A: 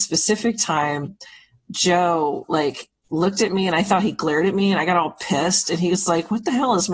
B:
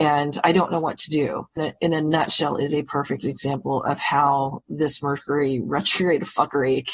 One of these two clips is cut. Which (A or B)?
B